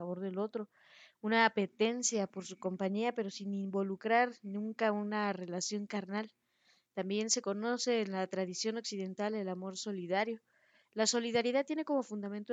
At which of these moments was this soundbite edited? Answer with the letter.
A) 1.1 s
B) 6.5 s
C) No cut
C